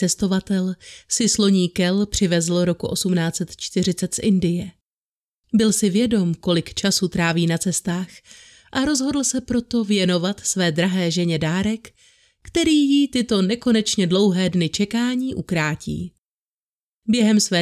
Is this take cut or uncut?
uncut